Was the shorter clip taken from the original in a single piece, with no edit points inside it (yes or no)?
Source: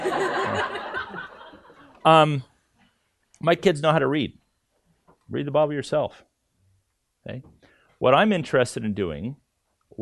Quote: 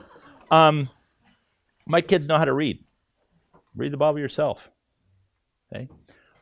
yes